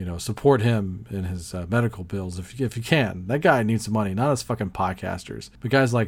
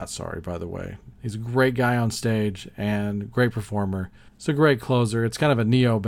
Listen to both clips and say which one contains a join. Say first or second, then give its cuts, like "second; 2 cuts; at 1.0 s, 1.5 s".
second; 2 cuts; at 1.1 s, 4.3 s